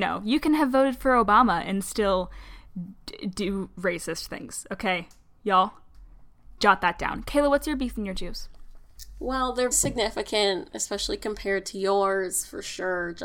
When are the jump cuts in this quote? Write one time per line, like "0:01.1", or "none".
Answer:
0:09.7